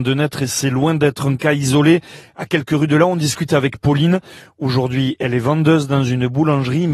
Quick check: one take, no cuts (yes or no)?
yes